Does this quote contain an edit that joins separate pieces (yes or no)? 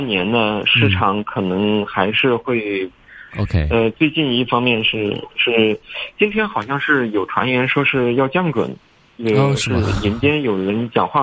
yes